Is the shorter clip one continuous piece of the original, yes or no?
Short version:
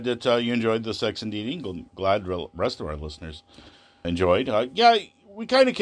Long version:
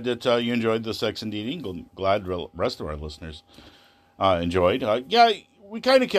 no